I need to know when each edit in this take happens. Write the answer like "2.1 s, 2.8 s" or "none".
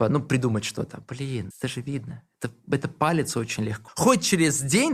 1.5 s, 3.9 s